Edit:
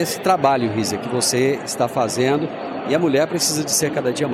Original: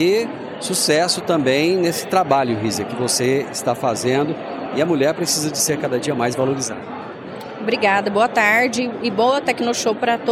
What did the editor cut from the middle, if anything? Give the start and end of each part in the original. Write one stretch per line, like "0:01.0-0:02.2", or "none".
none